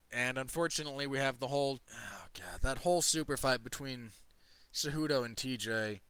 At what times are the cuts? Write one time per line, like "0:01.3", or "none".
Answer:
0:01.8